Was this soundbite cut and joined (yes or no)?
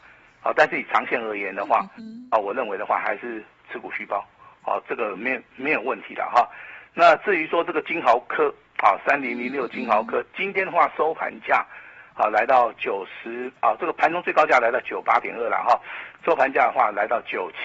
no